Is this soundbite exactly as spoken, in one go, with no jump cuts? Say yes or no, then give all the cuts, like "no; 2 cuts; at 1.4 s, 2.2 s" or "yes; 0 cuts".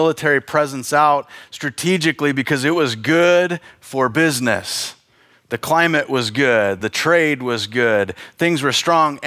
yes; 0 cuts